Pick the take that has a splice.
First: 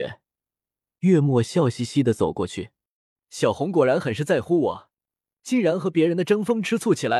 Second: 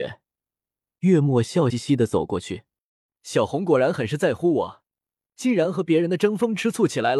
second; 1 cut; at 1.7 s

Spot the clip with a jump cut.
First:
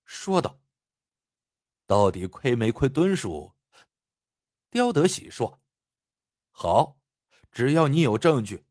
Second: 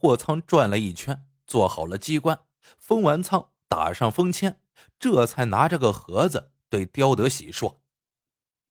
first; 1 cut; at 3.8 s

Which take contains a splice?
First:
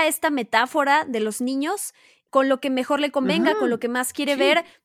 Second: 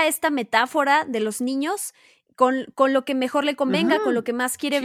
first; 1 cut; at 2.3 s

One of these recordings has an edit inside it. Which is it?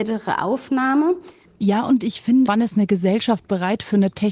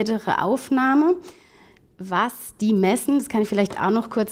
first; 2 cuts; at 1.4 s, 2.5 s

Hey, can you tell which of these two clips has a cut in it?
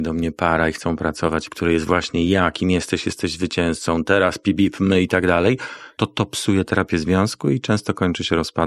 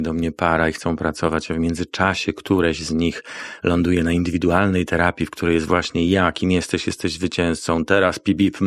first; 1 cut; at 1.5 s

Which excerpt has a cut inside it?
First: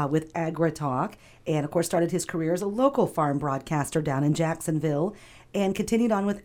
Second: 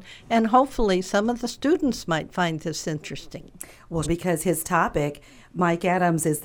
second; 1 cut; at 4.0 s

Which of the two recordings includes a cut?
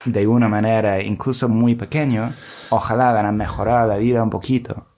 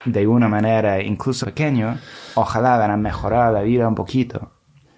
second; 1 cut; at 1.4 s

